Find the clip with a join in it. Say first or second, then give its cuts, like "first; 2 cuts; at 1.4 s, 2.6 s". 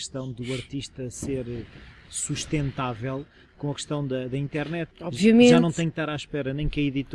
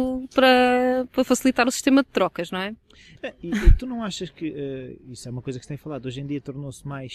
first; 1 cut; at 4.9 s